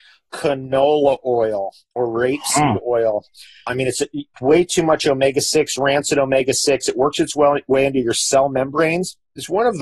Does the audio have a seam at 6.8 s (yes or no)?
no